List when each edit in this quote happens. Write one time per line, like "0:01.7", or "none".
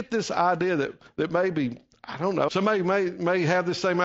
0:02.5